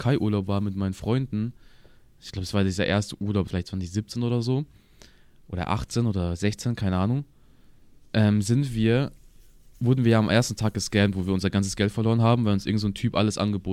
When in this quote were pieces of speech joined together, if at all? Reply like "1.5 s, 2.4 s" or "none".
3.5 s